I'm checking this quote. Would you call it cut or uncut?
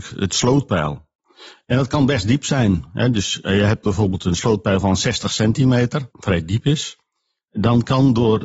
cut